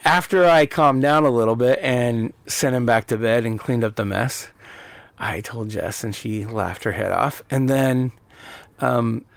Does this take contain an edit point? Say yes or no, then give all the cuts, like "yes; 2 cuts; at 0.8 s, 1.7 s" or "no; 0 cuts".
no; 0 cuts